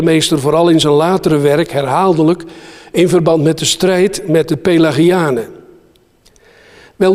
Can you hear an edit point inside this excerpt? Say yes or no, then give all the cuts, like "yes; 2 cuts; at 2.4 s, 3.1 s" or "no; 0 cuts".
no; 0 cuts